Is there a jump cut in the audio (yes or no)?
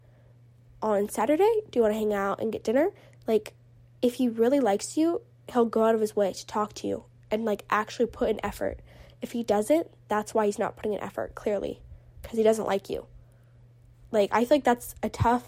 no